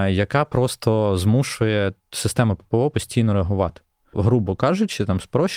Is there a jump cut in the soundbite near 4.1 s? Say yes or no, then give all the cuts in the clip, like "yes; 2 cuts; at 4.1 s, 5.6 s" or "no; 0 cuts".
yes; 1 cut; at 4.1 s